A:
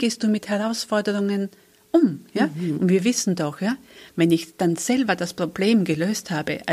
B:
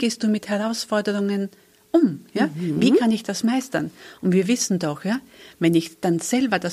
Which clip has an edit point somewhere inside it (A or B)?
A